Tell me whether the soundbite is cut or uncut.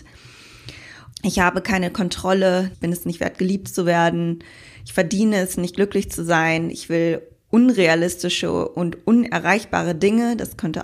cut